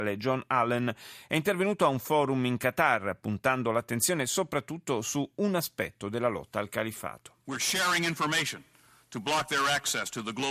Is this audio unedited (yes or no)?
yes